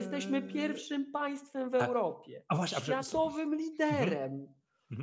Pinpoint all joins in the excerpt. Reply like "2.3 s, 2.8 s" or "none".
none